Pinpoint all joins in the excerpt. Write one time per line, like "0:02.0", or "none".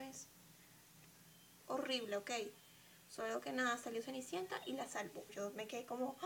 0:01.6
0:05.3

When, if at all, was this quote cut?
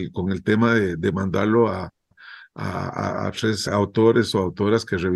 0:03.7

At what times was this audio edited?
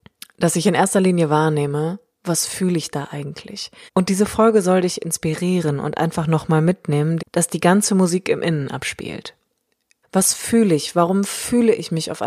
0:03.9
0:07.2
0:10.0

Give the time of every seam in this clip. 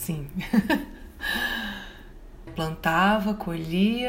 0:02.5

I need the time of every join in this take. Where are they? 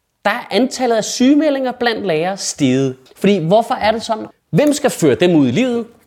0:03.1
0:04.3

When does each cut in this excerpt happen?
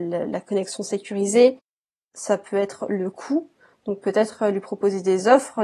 none

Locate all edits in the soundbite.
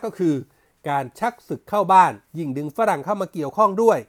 0:02.3

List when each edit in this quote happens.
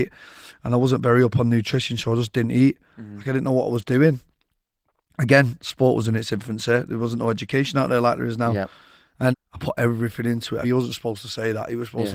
0:09.3
0:10.6

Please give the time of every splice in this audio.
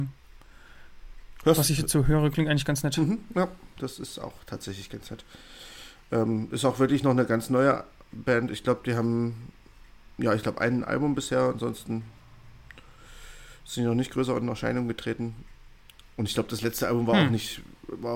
none

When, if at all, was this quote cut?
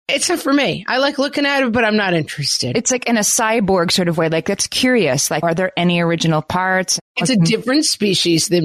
0:05.4
0:07.1

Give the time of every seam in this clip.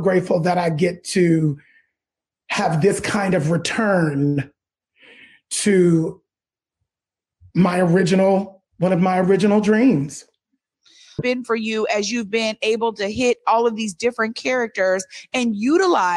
0:08.7
0:11.2

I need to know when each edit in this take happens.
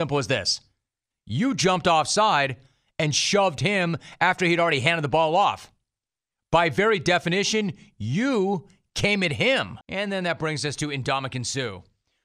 0:01.1
0:09.8

